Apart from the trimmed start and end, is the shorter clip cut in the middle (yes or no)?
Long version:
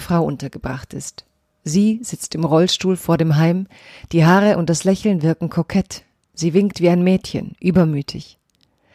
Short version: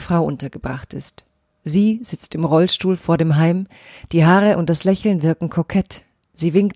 no